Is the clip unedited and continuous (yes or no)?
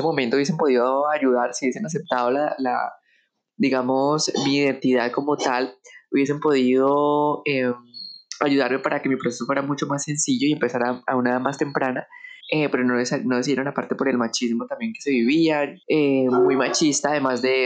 no